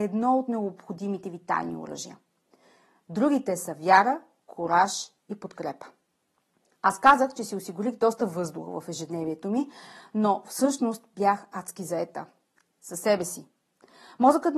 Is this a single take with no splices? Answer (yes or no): yes